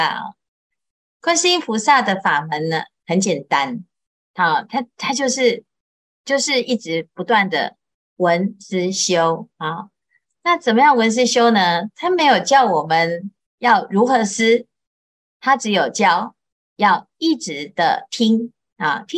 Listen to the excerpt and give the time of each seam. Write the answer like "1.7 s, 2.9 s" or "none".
none